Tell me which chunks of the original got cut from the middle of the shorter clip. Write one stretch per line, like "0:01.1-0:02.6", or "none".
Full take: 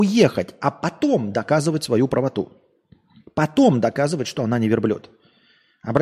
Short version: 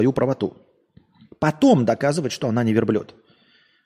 none